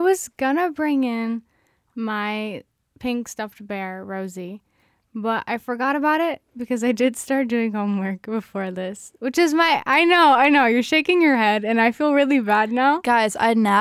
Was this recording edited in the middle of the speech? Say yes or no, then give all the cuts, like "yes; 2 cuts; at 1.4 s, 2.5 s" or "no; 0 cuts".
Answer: no; 0 cuts